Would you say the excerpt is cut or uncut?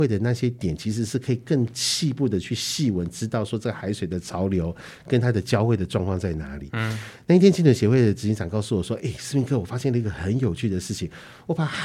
uncut